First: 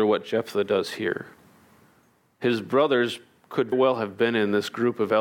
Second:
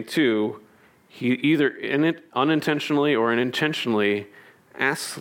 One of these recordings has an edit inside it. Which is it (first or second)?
first